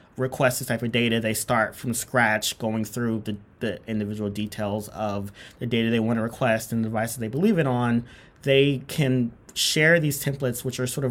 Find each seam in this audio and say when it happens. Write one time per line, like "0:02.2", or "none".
none